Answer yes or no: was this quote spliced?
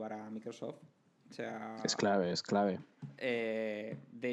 no